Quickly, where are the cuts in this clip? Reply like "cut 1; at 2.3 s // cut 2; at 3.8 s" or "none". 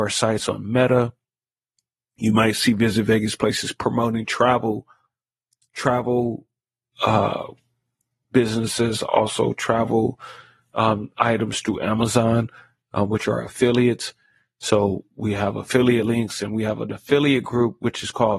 none